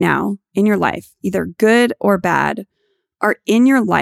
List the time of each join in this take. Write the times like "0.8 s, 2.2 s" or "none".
none